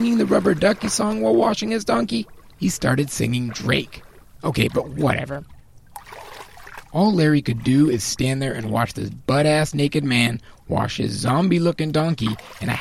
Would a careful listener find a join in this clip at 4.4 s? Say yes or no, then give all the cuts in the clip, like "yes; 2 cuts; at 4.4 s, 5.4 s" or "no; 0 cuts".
yes; 1 cut; at 4.4 s